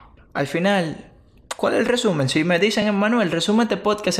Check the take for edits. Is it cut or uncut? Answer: uncut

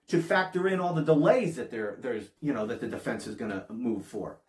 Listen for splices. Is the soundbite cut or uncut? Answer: cut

